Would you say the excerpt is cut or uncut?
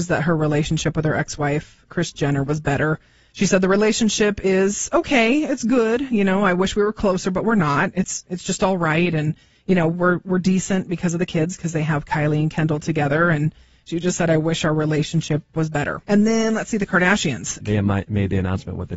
cut